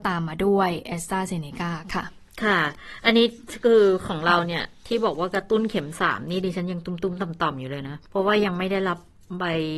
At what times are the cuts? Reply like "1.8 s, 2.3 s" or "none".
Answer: 8.0 s